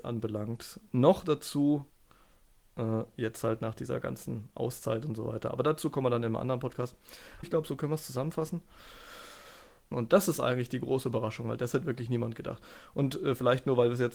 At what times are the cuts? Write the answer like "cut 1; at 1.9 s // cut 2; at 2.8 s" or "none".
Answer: cut 1; at 7.4 s // cut 2; at 9.9 s